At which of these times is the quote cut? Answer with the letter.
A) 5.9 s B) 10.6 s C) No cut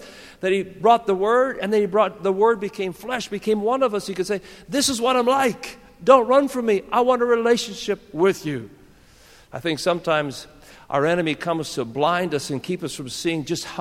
C